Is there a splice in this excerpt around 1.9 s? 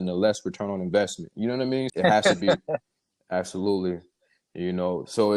yes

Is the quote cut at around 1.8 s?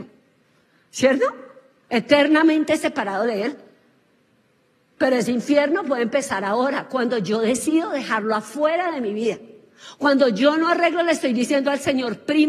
no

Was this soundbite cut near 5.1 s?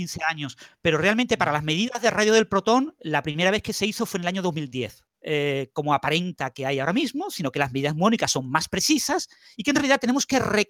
yes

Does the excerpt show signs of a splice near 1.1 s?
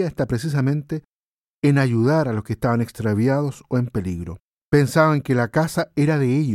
no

